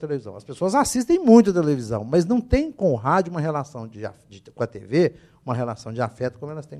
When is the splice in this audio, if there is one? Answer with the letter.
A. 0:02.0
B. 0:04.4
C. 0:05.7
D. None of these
D